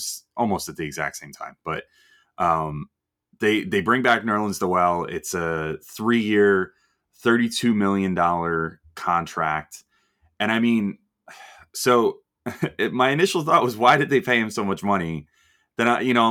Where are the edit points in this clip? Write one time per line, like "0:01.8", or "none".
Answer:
none